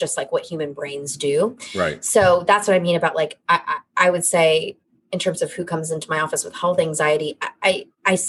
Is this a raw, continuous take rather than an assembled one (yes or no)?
yes